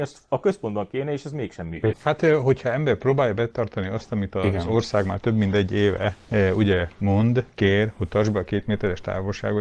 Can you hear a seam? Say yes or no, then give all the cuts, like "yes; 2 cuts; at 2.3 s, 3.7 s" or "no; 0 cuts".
yes; 1 cut; at 1.9 s